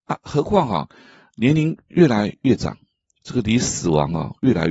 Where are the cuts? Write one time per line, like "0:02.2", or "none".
none